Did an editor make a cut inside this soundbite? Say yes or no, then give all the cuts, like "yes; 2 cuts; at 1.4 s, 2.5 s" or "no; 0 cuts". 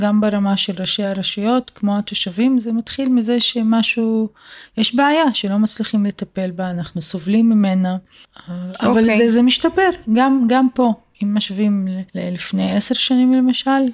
yes; 1 cut; at 12.1 s